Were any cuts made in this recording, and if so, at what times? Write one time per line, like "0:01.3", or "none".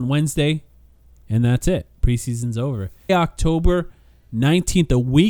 0:01.1
0:03.1